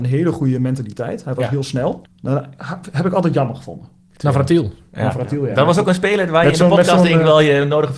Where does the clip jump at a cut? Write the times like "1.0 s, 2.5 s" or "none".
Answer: 2.0 s, 4.1 s